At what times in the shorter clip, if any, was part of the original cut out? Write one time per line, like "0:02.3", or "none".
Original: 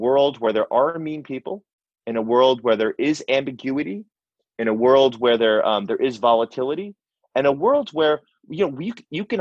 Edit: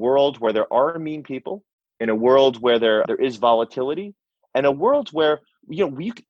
0:01.9
0:03.0